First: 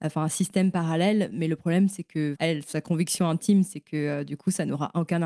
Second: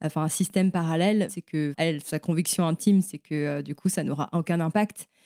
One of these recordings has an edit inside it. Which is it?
second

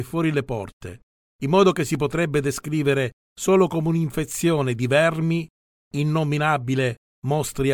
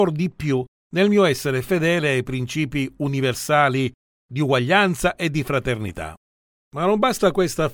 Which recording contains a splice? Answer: second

